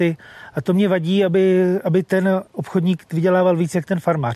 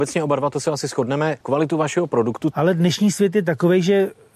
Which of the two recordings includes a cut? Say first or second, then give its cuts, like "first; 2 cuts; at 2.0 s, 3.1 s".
second; 2 cuts; at 1.4 s, 2.5 s